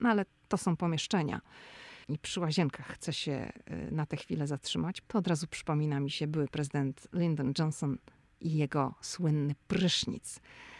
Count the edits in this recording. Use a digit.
2